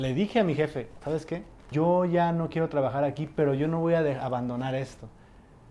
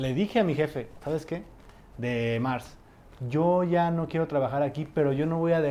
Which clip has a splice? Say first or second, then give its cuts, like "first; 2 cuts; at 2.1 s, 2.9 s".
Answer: first; 1 cut; at 1.7 s